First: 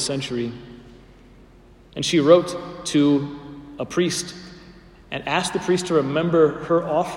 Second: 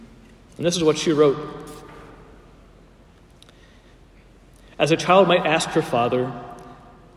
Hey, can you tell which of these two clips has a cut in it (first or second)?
first